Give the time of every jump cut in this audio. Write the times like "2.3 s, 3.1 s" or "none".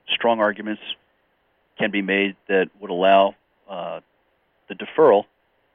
none